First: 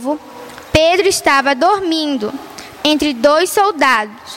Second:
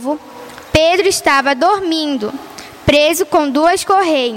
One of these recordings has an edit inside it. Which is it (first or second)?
first